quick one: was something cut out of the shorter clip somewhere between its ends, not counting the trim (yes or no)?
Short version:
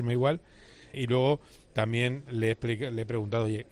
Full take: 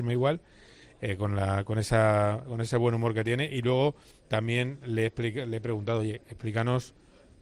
yes